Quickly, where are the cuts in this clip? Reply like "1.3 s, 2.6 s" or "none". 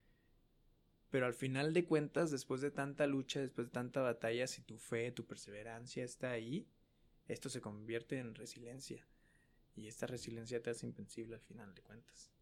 none